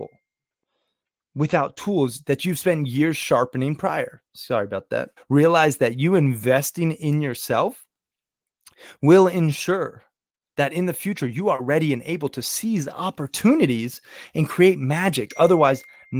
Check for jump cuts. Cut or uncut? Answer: cut